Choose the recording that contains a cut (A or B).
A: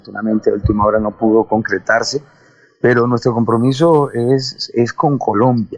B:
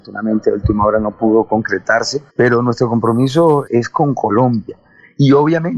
B